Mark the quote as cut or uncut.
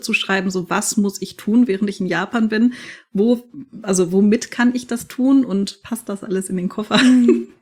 uncut